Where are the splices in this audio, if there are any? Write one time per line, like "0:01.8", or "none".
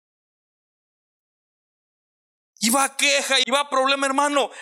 0:03.4